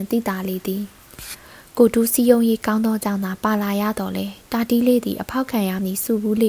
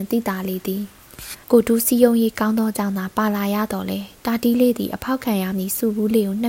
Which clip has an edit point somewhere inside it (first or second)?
second